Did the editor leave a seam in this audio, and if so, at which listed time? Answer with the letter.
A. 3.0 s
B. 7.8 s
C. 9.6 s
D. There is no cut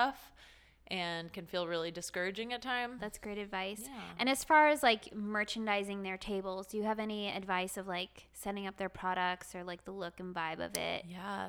A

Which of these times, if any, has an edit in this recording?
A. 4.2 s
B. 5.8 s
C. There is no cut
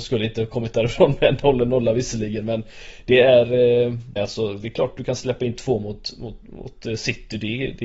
A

